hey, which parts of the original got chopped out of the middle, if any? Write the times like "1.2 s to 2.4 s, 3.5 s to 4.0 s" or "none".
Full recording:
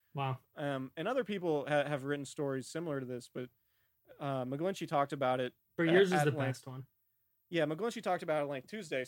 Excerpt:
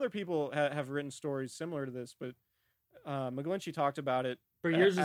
none